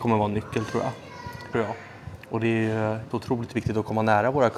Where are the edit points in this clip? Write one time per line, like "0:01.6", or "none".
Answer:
0:01.5
0:03.1